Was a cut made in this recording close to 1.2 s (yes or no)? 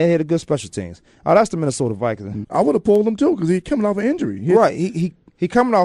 no